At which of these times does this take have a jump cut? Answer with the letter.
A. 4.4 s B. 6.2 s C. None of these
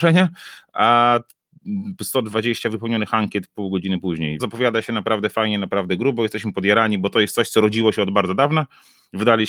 A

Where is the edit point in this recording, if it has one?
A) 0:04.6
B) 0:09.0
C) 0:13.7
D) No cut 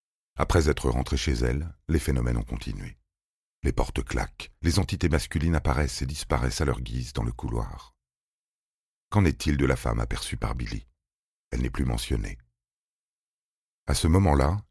A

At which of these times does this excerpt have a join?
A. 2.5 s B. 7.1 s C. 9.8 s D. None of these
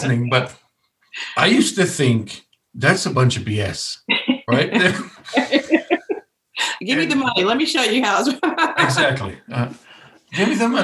D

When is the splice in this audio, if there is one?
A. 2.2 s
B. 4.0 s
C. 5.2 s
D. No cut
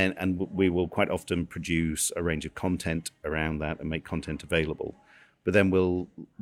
D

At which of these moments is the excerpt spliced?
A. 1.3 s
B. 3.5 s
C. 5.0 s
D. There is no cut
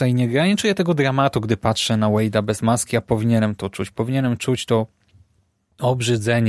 D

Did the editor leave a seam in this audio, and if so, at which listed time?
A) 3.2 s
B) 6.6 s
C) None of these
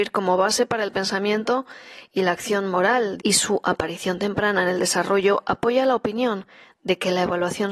A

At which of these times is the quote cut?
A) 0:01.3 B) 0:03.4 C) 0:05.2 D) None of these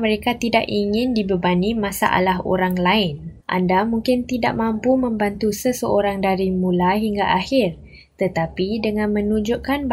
B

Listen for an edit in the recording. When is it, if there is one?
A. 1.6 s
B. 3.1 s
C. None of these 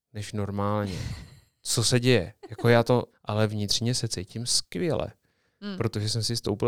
B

